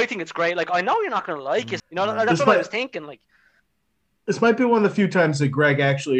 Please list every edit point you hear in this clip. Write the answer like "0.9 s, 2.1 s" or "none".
1.8 s